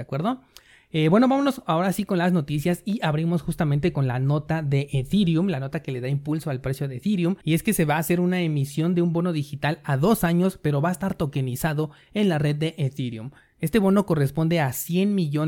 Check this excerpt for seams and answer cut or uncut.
cut